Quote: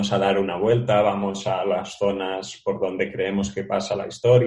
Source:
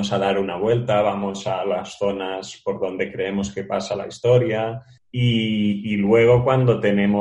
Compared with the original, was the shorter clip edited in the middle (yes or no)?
no